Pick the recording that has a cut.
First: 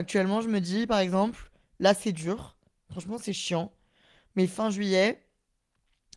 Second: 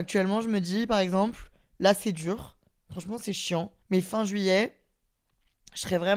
second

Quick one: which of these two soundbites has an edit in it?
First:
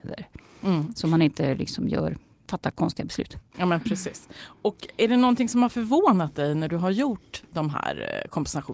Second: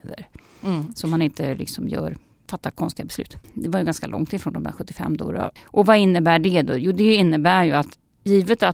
second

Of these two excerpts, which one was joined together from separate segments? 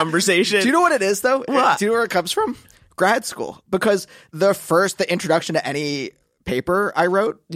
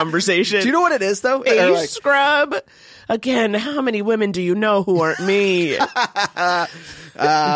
second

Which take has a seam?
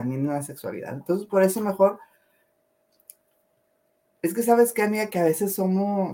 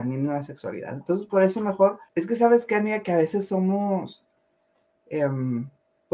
second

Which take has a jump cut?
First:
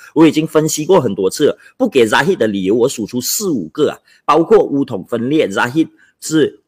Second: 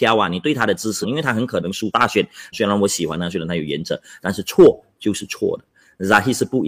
second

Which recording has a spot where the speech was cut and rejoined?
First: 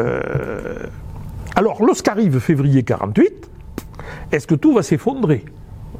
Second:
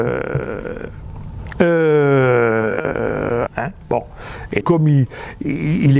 second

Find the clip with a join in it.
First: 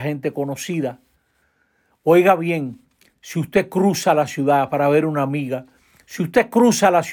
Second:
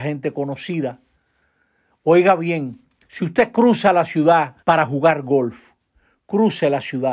second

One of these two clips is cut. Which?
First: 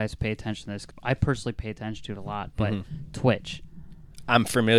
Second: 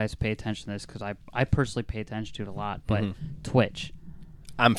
first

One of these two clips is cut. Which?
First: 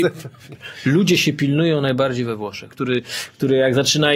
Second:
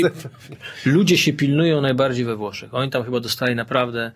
first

